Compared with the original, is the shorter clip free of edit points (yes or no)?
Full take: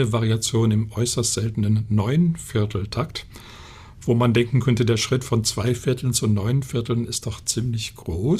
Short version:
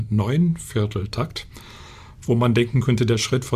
yes